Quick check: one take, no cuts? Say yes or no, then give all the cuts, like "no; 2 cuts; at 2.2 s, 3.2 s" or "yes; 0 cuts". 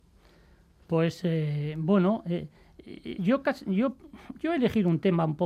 yes; 0 cuts